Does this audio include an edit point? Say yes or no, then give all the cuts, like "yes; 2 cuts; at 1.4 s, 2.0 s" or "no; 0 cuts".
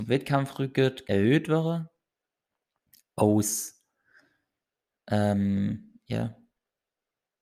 yes; 1 cut; at 1.0 s